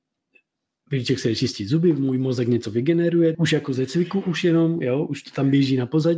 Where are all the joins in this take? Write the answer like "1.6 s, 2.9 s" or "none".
3.3 s